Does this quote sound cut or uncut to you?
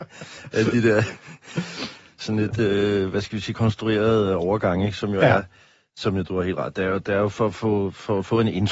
uncut